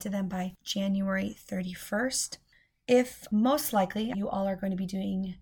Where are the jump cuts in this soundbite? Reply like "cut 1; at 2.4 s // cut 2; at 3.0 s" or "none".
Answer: cut 1; at 4.1 s

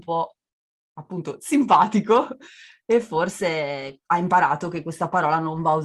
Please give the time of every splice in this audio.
cut 1; at 4.0 s

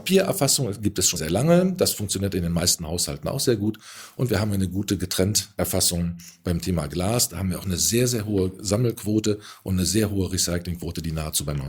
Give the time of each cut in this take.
cut 1; at 1.2 s

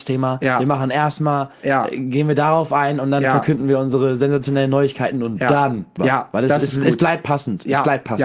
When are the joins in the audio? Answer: cut 1; at 6.0 s

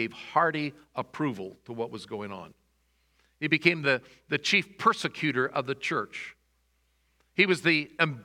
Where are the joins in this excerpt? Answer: none

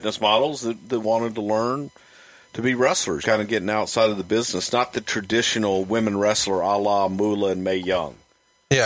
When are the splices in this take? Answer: cut 1; at 3.2 s

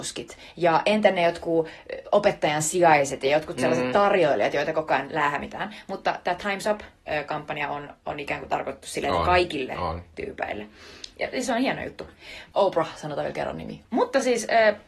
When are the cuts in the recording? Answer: cut 1; at 12.5 s // cut 2; at 13.8 s

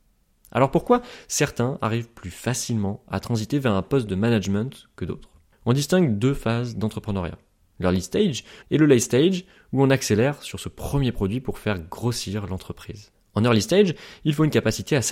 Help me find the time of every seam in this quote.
cut 1; at 8.6 s

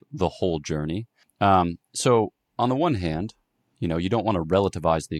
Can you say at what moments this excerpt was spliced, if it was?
cut 1; at 1.2 s

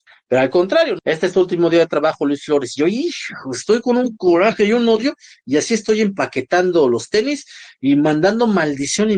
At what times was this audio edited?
cut 1; at 1.0 s

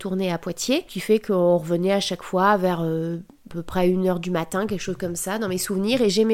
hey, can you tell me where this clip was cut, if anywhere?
none

